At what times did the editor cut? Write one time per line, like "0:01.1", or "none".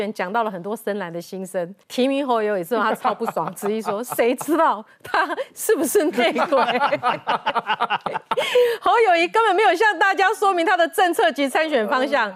0:01.8